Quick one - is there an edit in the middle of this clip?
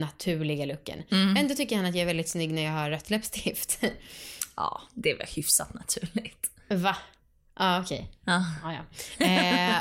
no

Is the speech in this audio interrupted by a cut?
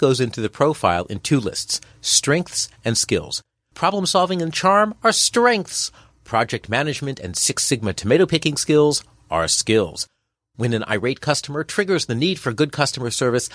no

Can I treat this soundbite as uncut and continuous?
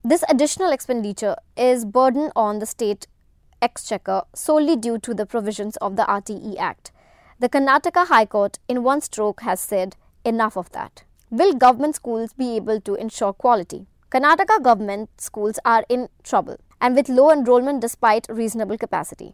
yes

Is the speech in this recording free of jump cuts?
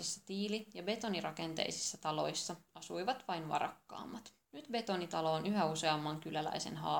no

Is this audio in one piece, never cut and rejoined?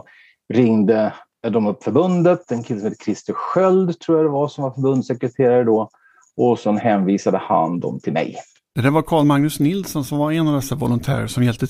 yes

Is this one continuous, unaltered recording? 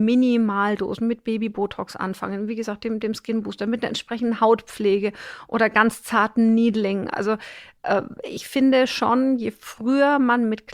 yes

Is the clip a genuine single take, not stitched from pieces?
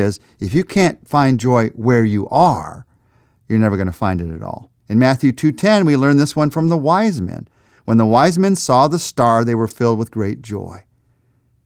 no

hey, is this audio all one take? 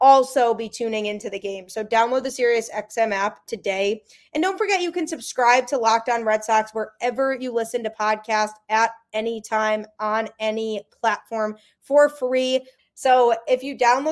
no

